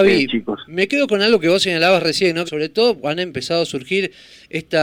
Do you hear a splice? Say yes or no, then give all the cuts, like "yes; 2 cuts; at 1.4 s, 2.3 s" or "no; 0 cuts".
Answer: yes; 1 cut; at 2.4 s